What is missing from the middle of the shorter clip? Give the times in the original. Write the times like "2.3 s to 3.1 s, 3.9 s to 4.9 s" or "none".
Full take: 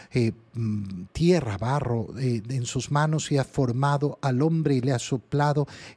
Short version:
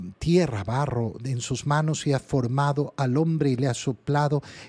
2.1 s to 2.4 s